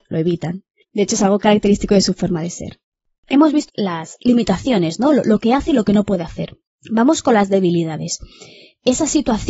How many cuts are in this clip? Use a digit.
1